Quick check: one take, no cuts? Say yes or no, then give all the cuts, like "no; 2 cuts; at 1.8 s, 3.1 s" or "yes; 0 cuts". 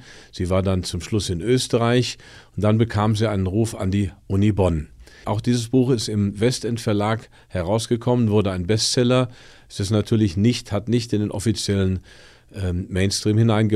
no; 1 cut; at 5.2 s